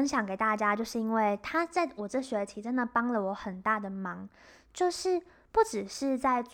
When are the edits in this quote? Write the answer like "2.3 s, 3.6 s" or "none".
none